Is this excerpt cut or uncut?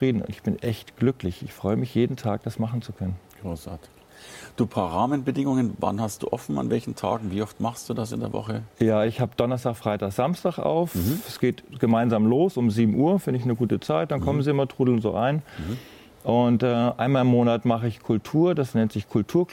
uncut